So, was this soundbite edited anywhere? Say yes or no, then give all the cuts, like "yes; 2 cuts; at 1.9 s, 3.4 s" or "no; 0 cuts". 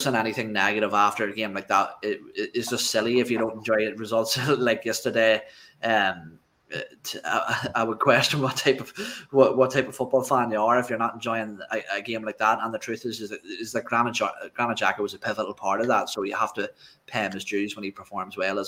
no; 0 cuts